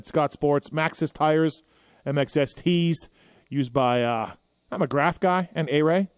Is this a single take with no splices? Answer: yes; 0 cuts

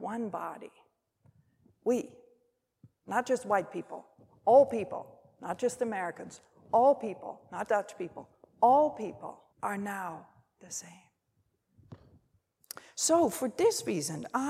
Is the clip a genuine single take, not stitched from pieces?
no; 2 cuts; at 7.7 s, 9.5 s

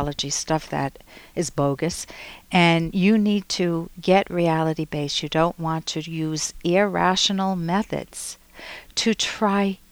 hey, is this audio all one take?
yes; 0 cuts

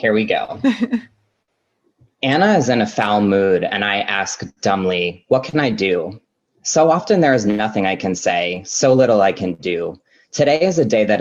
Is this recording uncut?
yes; 0 cuts

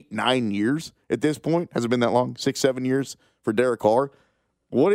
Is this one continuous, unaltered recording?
yes; 0 cuts

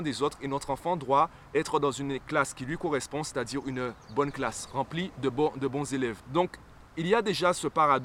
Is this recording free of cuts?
yes; 0 cuts

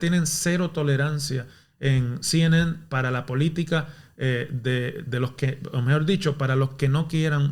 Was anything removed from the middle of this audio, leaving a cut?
no; 0 cuts

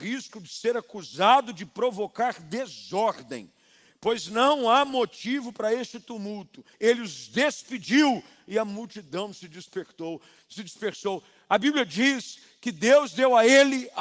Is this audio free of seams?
no; 1 cut; at 6.7 s

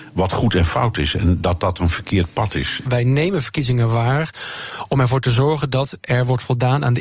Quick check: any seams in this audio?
yes; 1 cut; at 2.8 s

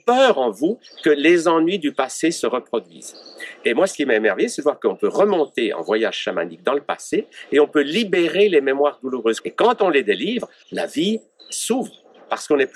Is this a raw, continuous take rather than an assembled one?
no; 2 cuts; at 9.4 s, 10.6 s

